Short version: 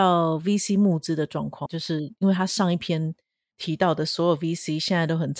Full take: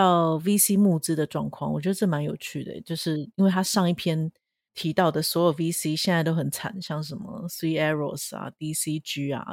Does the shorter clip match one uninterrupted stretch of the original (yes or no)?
no